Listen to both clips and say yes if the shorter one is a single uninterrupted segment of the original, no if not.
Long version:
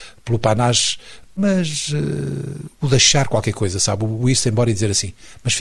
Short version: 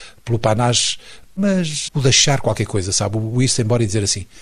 no